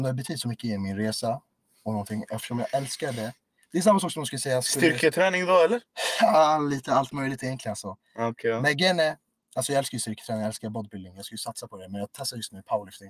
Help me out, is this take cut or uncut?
uncut